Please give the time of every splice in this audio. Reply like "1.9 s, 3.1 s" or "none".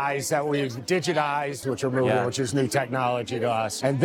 1.6 s